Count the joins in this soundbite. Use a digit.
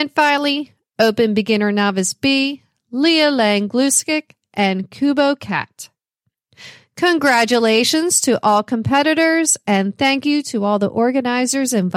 0